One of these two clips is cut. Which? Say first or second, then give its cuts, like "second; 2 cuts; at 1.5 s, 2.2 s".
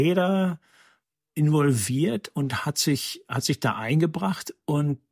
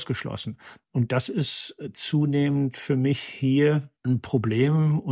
second; 1 cut; at 4.0 s